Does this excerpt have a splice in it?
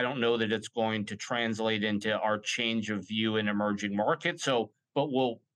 no; 0 cuts

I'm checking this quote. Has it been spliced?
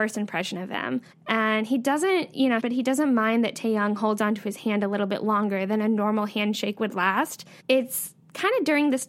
yes; 3 cuts; at 1.1 s, 2.6 s, 7.6 s

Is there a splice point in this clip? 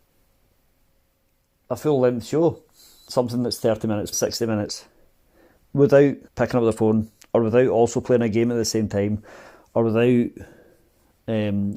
yes; 2 cuts; at 4.1 s, 6.3 s

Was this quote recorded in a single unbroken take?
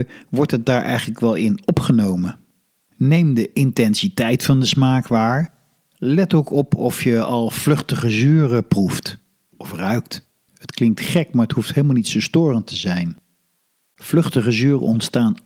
no; 2 cuts; at 2.8 s, 10.5 s

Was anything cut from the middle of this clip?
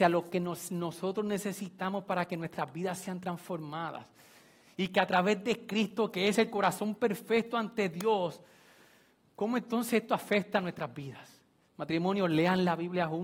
yes; 1 cut; at 11.6 s

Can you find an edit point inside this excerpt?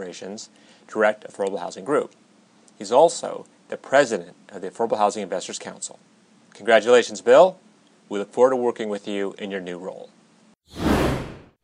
no; 0 cuts

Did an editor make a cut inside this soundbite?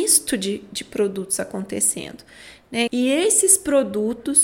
yes; 1 cut; at 2.9 s

